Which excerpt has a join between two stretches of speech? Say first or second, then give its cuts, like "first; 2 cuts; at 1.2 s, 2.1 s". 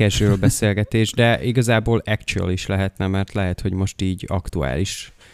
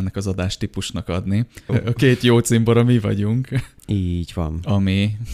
second; 2 cuts; at 1.7 s, 3.8 s